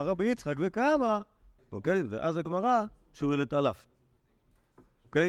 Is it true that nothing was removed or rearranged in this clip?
no; 1 cut; at 1.6 s

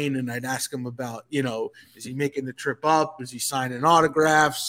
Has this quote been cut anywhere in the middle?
no; 0 cuts

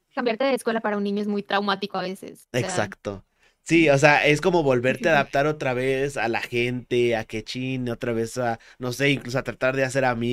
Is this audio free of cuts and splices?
yes; 0 cuts

